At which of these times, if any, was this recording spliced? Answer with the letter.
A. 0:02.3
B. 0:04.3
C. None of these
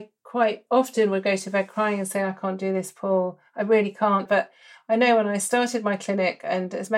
B